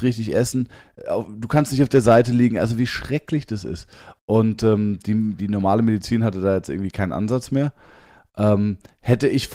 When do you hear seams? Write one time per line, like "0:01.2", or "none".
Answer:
0:05.4